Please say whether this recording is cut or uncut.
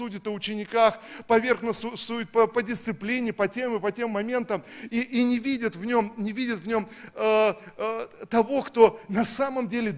uncut